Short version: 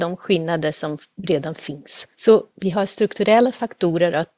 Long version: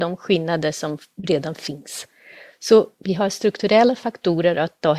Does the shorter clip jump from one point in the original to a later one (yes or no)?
yes